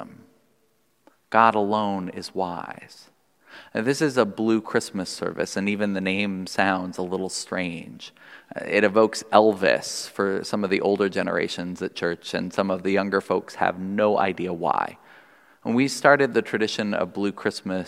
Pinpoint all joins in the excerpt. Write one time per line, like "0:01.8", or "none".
none